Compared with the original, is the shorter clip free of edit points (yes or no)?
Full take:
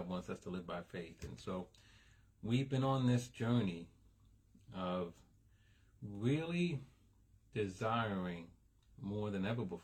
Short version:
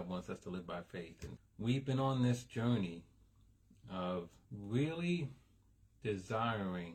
no